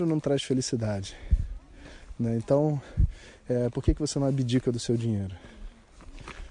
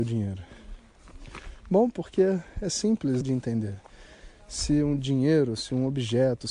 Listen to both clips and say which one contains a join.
second; 1 cut; at 3.2 s

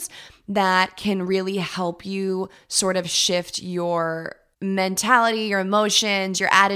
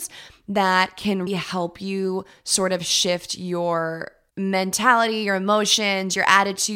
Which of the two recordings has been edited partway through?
second; 1 cut; at 1.3 s

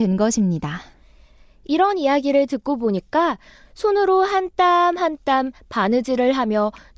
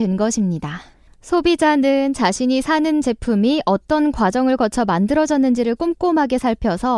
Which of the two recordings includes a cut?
second; 1 cut; at 1.1 s

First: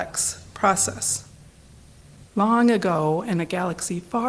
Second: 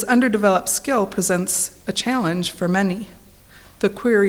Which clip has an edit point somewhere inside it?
first; 1 cut; at 2.2 s

